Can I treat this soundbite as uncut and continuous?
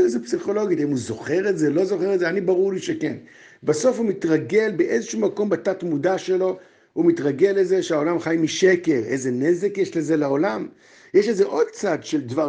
yes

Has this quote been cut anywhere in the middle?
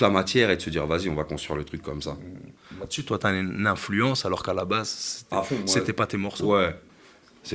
no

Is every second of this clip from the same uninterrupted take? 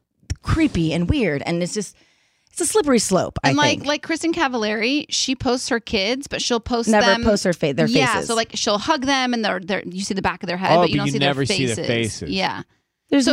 yes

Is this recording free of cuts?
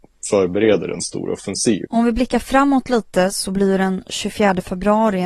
no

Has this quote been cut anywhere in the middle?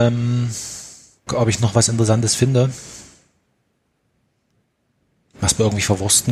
yes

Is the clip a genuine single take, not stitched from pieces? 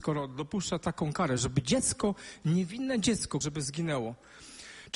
no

